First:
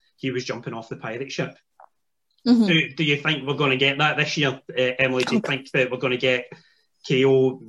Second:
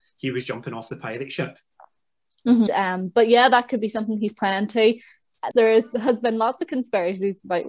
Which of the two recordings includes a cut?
second; 2 cuts; at 2.7 s, 5.5 s

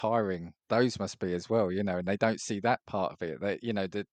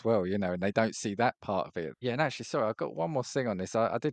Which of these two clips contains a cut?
second; 1 cut; at 1.9 s

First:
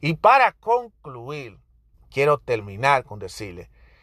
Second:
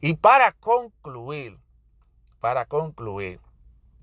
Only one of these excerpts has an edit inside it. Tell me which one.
first; 1 cut; at 1.9 s

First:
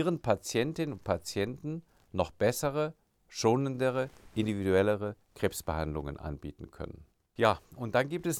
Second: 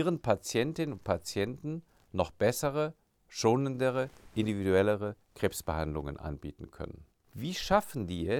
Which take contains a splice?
second; 1 cut; at 7.2 s

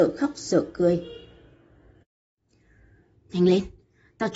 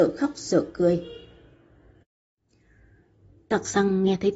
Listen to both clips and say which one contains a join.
first; 1 cut; at 3.2 s

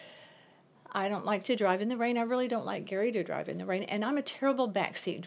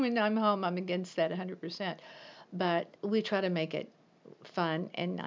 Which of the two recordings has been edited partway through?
second; 1 cut; at 3.0 s

